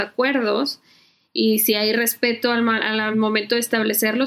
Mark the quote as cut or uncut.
uncut